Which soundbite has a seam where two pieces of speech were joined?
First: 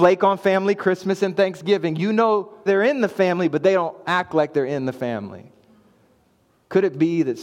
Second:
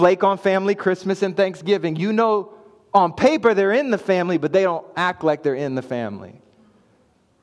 first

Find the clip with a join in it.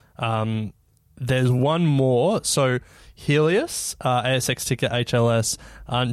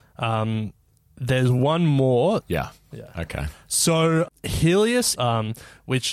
second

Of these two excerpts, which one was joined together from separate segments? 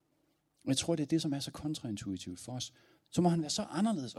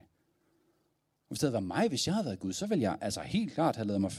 first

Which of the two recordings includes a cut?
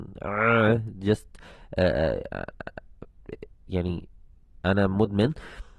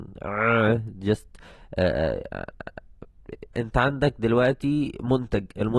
second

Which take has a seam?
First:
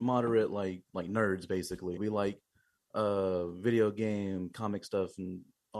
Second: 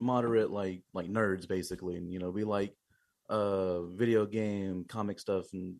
first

